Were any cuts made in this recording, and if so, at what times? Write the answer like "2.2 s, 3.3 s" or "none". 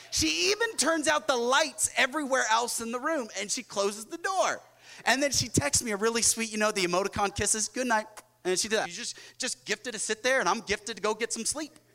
8.8 s